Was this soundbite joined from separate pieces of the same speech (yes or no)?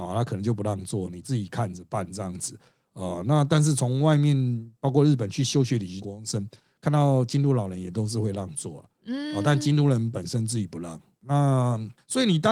yes